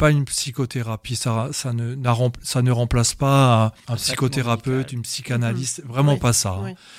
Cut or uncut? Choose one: uncut